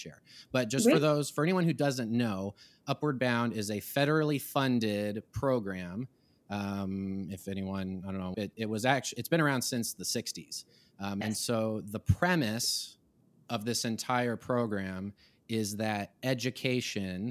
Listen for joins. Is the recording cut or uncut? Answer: cut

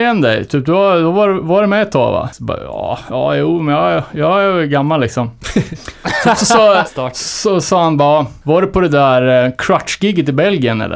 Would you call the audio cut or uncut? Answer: cut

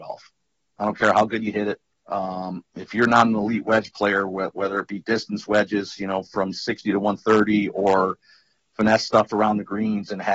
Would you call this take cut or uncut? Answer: cut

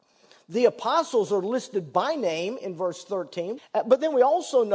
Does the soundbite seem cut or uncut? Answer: cut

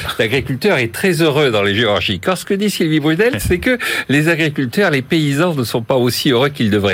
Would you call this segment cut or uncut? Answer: uncut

